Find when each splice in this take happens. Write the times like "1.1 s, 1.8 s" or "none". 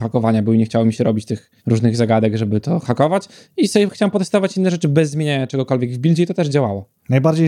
1.6 s